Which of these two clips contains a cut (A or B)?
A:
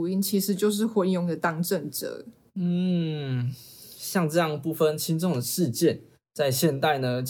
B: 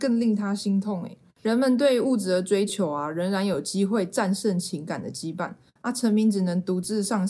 B